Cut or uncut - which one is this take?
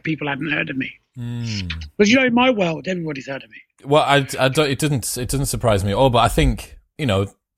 uncut